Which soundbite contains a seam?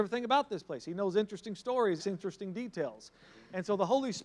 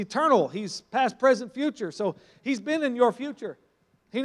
first; 1 cut; at 2.0 s

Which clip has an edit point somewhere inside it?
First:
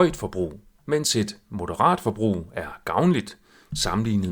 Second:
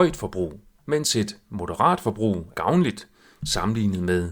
second; 1 cut; at 2.5 s

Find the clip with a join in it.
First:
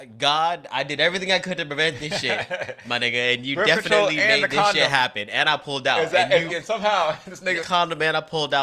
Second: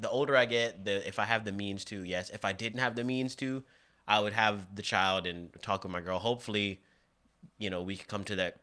first; 2 cuts; at 6.5 s, 7.6 s

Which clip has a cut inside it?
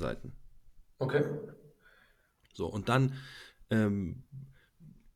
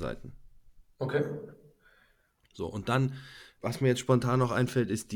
second; 1 cut; at 3.6 s

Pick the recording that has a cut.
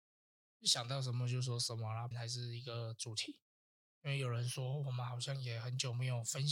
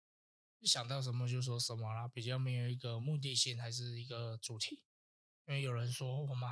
first; 1 cut; at 2.1 s

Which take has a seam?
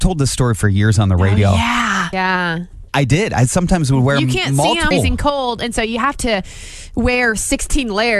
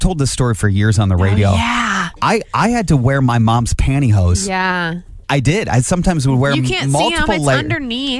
first; 2 cuts; at 2.1 s, 4.9 s

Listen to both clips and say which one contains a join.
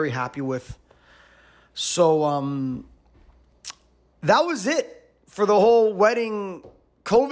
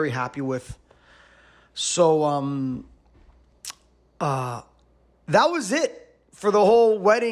first; 1 cut; at 4.1 s

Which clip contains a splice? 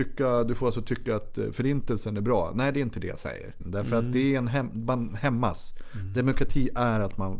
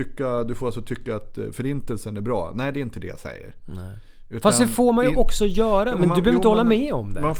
first; 1 cut; at 3.6 s

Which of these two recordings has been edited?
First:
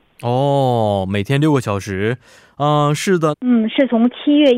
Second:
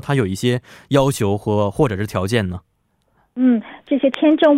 first; 1 cut; at 3.3 s

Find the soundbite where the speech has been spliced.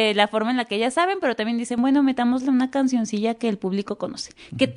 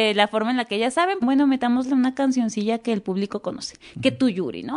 second; 1 cut; at 1.2 s

